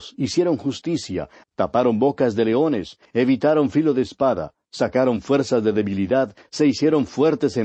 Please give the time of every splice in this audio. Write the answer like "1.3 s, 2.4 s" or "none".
1.4 s, 3.0 s